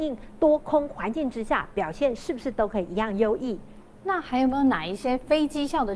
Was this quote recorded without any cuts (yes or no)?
no